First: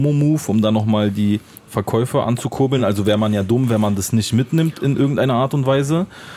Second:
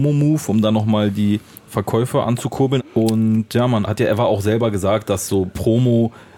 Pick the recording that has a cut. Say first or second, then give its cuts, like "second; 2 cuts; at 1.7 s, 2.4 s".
second; 2 cuts; at 2.8 s, 3.9 s